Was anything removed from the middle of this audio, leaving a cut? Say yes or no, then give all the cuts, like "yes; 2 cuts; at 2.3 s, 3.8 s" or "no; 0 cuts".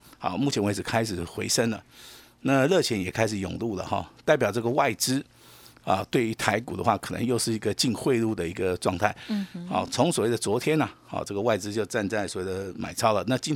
no; 0 cuts